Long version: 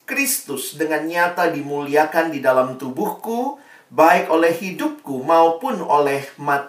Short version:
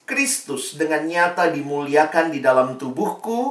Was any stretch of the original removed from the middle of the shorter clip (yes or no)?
no